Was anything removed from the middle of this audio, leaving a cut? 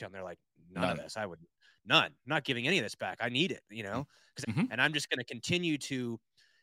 yes; 1 cut; at 4.4 s

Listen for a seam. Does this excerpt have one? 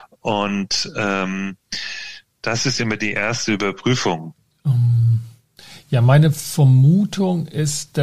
no; 0 cuts

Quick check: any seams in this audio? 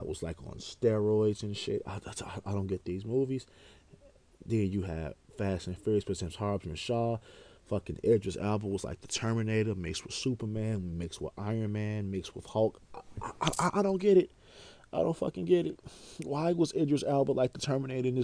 no; 0 cuts

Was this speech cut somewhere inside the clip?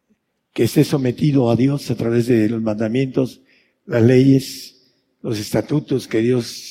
no; 0 cuts

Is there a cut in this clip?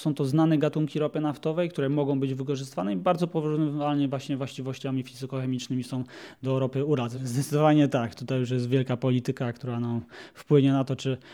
yes; 1 cut; at 7.2 s

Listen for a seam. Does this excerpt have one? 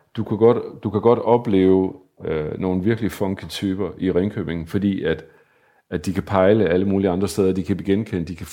no; 0 cuts

